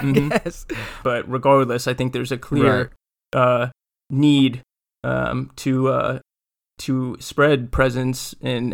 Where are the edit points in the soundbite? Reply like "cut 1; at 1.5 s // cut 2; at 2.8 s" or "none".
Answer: cut 1; at 1.0 s